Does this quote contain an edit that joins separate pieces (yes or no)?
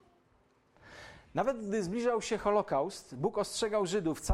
no